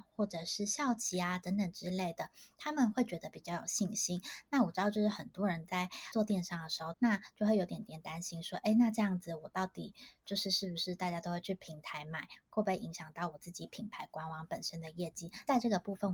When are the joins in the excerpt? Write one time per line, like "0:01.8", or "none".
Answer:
0:06.9